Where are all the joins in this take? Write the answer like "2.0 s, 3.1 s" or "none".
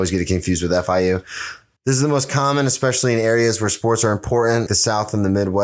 1.8 s, 4.7 s